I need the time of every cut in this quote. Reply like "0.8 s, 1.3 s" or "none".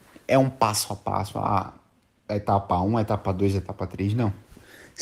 none